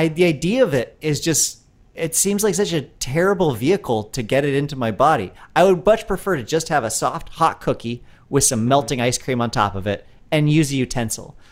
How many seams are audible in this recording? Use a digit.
0